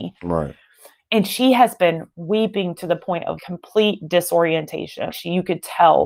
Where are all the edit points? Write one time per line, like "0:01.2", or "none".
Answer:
0:03.4
0:05.1

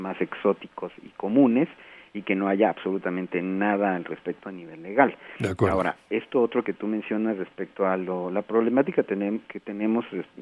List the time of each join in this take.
none

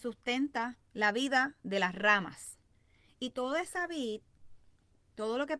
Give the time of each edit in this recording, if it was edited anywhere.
none

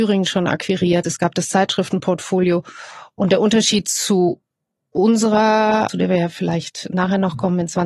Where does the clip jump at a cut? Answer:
0:01.0
0:05.9

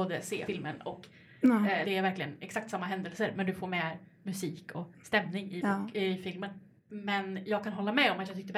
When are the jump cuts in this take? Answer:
0:01.8
0:06.9

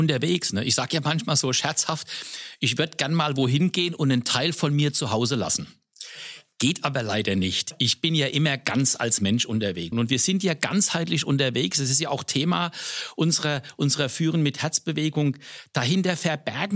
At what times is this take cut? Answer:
0:09.9

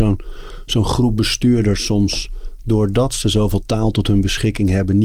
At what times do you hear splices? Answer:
none

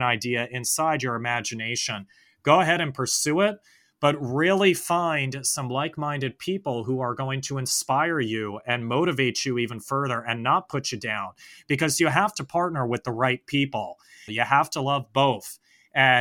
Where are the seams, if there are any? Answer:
0:14.3

